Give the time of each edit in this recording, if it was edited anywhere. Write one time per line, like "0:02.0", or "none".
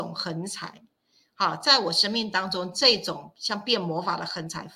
none